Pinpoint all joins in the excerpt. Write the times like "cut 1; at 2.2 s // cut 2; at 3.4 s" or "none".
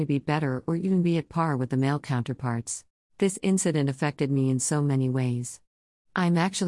cut 1; at 3.0 s

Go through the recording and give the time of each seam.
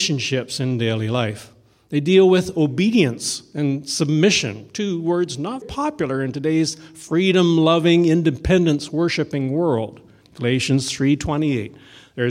cut 1; at 5.6 s // cut 2; at 10.2 s

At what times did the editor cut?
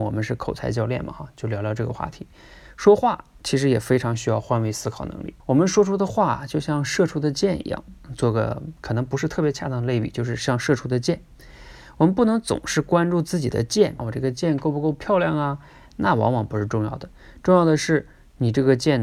cut 1; at 5.4 s // cut 2; at 14.0 s

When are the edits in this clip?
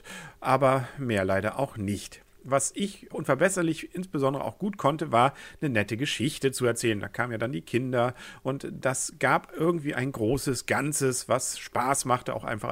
cut 1; at 3.1 s

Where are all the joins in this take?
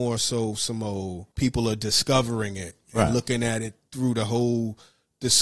cut 1; at 1.3 s

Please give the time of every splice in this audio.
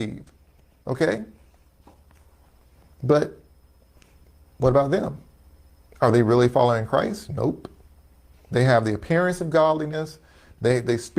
cut 1; at 8.3 s

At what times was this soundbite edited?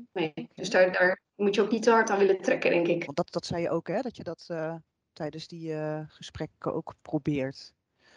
cut 1; at 3.1 s

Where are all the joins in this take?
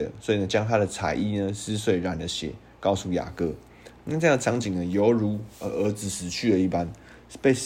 none

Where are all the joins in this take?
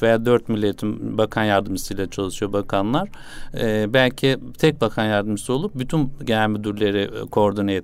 none

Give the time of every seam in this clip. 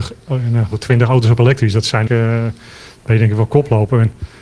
cut 1; at 2.1 s

